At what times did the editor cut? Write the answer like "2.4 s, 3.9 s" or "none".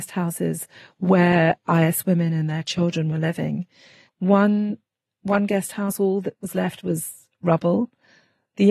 4.1 s